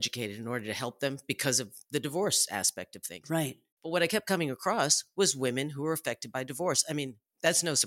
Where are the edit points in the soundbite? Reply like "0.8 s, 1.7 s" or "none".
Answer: 3.8 s